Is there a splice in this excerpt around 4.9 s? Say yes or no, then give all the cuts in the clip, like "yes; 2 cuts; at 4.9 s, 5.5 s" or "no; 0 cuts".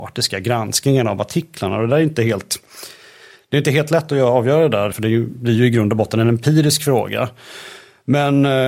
yes; 1 cut; at 4.9 s